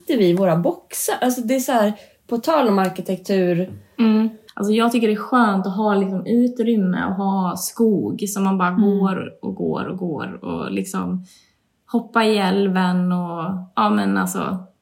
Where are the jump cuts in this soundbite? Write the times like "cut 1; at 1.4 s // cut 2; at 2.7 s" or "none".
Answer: cut 1; at 4.5 s

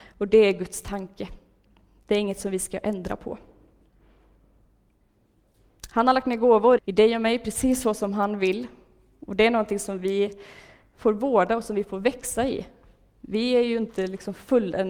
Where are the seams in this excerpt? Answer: cut 1; at 6.8 s

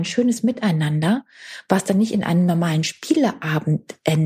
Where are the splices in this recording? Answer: none

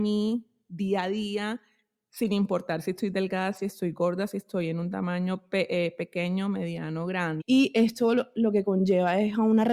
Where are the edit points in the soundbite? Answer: cut 1; at 7.4 s

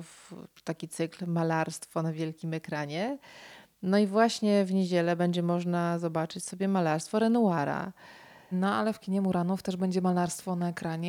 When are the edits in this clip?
cut 1; at 8.5 s

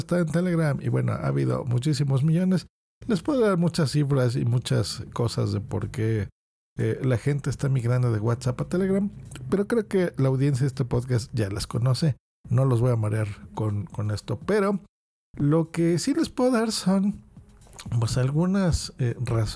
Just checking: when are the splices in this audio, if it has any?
none

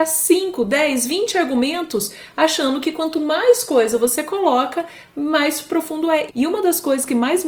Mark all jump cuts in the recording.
cut 1; at 6.3 s

